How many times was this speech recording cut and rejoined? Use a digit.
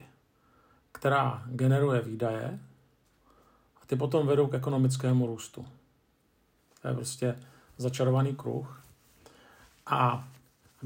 0